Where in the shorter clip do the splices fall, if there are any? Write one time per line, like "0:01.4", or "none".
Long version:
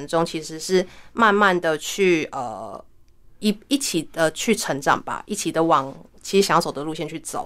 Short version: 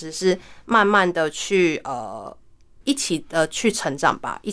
0:02.8

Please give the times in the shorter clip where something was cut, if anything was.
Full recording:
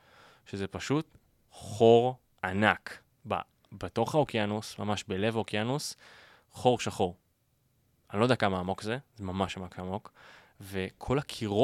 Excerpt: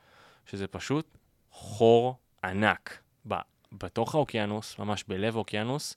none

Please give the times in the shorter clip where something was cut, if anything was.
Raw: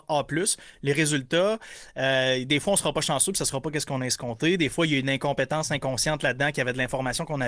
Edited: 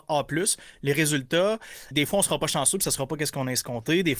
0:01.9

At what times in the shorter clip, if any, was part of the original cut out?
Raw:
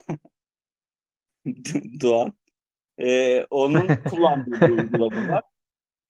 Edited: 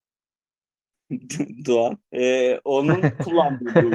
0:02.0

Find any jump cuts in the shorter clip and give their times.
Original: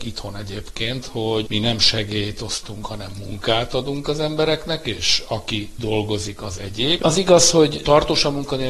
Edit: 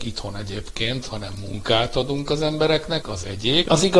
0:01.1
0:03.0

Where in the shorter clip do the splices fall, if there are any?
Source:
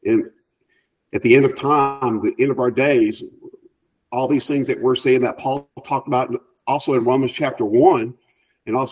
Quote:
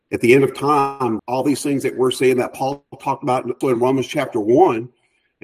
0:01.2
0:03.6

